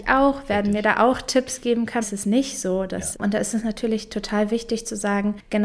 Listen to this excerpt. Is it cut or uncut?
cut